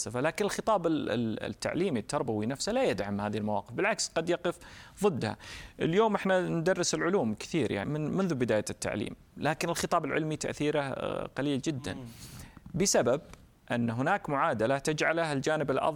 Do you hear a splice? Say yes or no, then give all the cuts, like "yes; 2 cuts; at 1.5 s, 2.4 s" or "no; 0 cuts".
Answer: yes; 2 cuts; at 7.8 s, 13.6 s